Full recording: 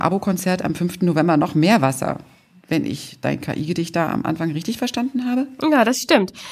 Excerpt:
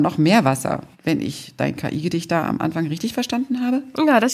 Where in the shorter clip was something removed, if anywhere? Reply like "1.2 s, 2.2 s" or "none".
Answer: 0.9 s